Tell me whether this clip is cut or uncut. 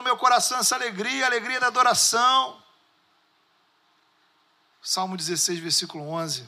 cut